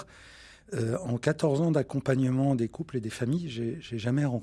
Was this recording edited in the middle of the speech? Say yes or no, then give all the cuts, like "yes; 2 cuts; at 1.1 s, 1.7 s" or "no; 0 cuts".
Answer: no; 0 cuts